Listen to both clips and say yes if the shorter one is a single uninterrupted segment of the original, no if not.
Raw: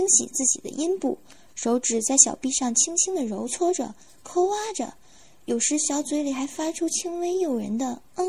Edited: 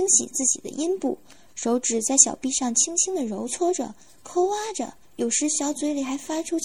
no